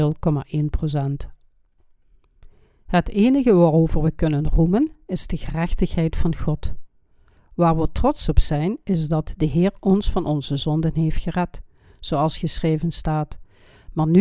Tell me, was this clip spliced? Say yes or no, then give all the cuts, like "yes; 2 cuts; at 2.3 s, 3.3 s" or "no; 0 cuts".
no; 0 cuts